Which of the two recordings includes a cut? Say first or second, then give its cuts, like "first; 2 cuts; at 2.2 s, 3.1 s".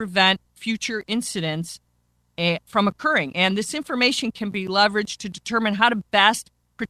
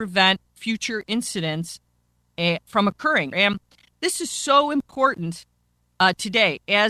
second; 1 cut; at 3.3 s